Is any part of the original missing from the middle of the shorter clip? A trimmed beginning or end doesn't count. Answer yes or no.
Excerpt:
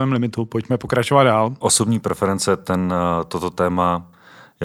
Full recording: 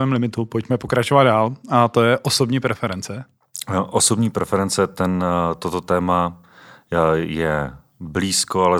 yes